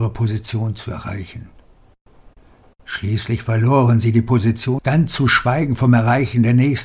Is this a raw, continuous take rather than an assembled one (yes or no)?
no